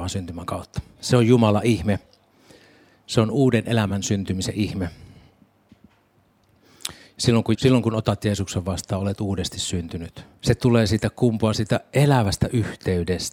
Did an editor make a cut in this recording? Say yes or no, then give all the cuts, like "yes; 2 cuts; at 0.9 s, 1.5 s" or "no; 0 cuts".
yes; 2 cuts; at 7.5 s, 10.4 s